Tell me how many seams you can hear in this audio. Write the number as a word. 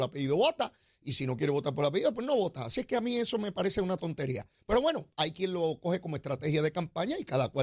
zero